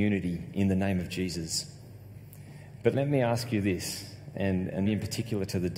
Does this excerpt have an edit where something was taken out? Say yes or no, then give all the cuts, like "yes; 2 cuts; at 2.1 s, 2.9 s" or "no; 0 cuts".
yes; 1 cut; at 4.9 s